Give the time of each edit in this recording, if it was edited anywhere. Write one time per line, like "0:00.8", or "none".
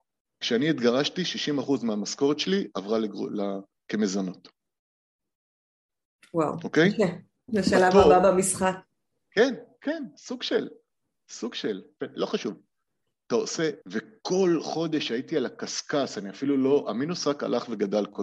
0:07.5
0:12.0
0:13.8